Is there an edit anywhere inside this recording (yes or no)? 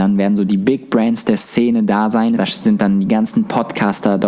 yes